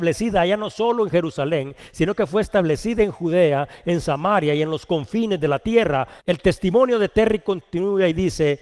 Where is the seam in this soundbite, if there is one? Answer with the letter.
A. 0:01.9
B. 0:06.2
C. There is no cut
B